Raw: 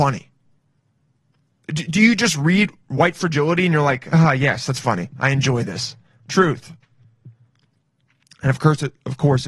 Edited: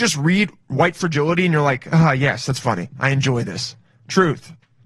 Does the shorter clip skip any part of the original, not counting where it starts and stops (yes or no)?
no